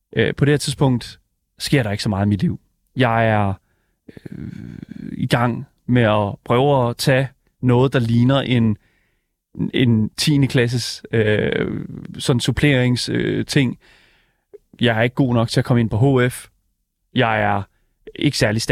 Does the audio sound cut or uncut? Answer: uncut